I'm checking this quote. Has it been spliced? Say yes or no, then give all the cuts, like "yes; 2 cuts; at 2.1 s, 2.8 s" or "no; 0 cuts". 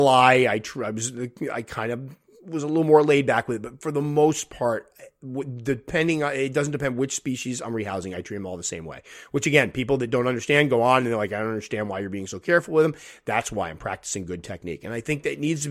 no; 0 cuts